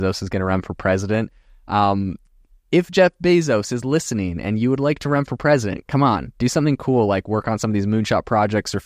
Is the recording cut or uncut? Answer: uncut